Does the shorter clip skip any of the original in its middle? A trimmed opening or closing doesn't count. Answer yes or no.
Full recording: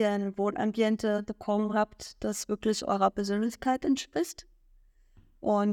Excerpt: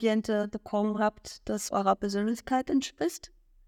yes